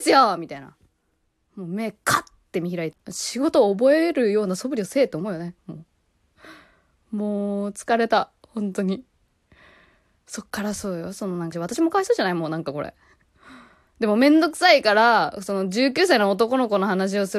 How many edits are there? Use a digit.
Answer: 2